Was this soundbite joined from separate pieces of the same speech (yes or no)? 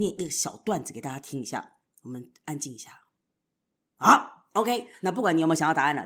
yes